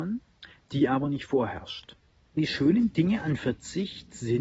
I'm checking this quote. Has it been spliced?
no; 0 cuts

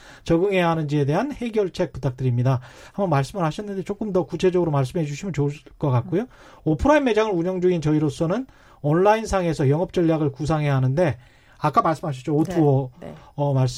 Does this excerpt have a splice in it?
no; 0 cuts

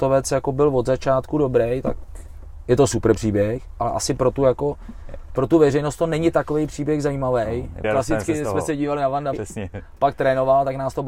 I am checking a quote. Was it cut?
yes; 2 cuts; at 7.8 s, 9.3 s

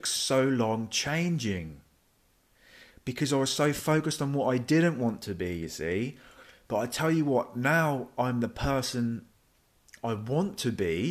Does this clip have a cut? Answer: no; 0 cuts

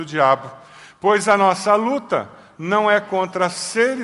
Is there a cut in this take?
no; 0 cuts

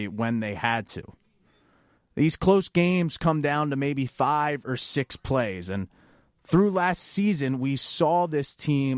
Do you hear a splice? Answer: no; 0 cuts

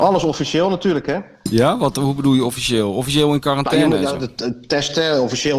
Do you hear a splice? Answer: no; 0 cuts

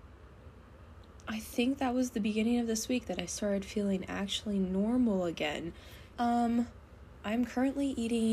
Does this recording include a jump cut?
yes; 1 cut; at 6.1 s

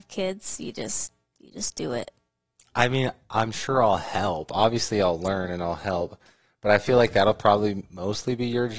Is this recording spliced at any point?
no; 0 cuts

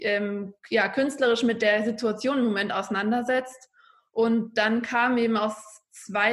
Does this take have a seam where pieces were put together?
no; 0 cuts

